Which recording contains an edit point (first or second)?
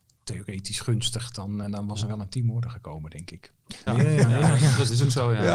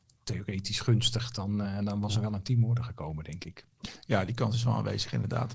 first